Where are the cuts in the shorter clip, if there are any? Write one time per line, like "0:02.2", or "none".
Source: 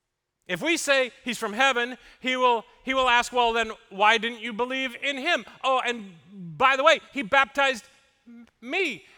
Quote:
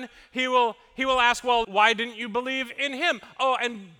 0:01.6